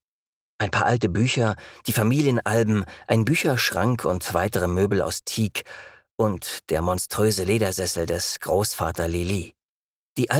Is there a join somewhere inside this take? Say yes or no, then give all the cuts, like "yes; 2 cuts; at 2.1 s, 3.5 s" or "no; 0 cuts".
no; 0 cuts